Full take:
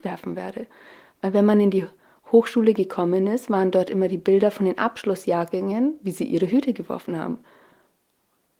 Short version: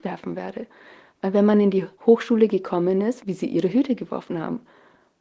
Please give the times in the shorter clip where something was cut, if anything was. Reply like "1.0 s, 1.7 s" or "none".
1.9 s, 3.2 s